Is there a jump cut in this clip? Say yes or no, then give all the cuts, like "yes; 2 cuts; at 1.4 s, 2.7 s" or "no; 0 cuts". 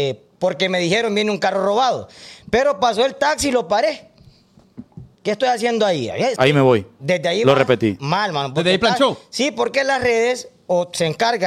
yes; 2 cuts; at 5.1 s, 6.4 s